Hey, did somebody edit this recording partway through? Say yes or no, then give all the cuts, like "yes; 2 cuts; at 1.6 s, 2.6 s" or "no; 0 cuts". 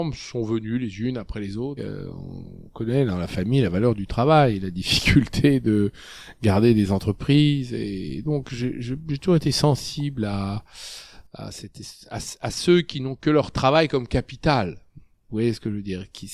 yes; 1 cut; at 1.8 s